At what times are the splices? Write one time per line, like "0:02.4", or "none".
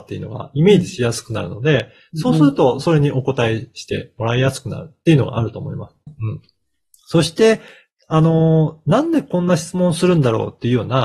0:06.1